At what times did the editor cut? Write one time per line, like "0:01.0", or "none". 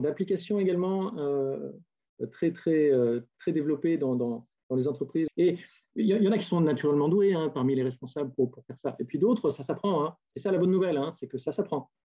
0:05.3